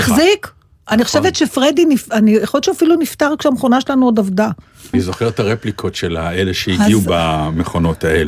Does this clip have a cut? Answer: yes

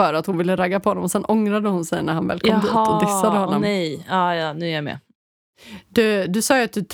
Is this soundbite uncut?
yes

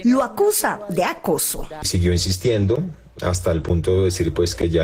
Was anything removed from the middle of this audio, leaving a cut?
no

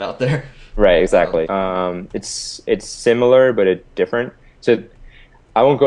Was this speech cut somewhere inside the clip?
yes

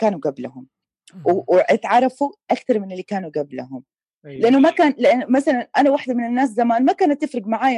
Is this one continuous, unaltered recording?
yes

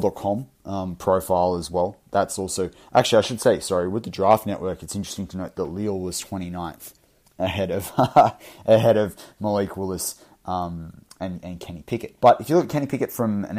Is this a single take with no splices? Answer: no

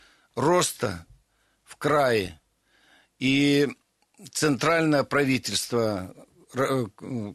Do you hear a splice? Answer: no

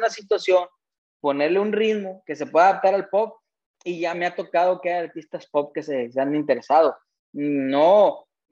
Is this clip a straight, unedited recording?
no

